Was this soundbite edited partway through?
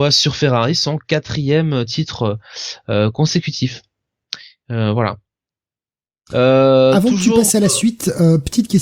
no; 0 cuts

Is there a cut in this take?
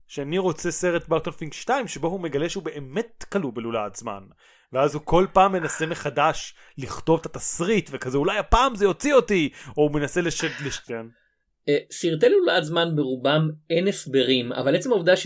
yes; 1 cut; at 10.9 s

